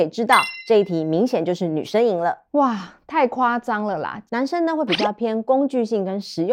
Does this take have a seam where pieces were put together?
yes; 2 cuts; at 2.5 s, 4.3 s

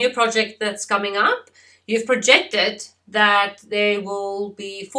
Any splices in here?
no; 0 cuts

